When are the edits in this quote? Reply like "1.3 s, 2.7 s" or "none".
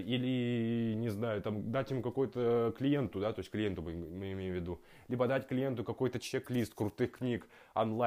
none

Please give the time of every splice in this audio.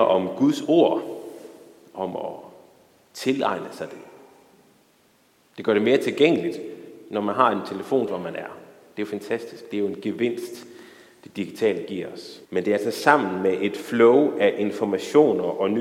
8.1 s, 12.4 s

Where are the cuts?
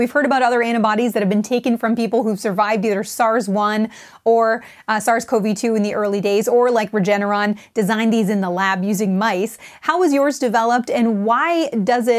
none

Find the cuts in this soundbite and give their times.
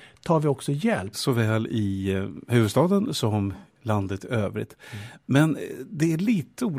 1.1 s

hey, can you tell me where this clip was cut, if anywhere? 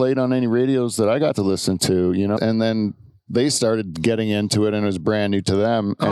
2.4 s

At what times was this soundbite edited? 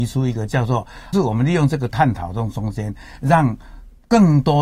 1.1 s

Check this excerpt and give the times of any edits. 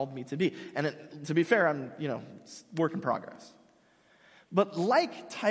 none

